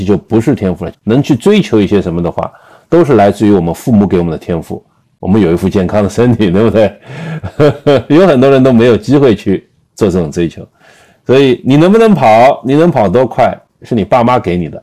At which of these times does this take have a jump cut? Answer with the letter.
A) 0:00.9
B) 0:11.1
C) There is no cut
A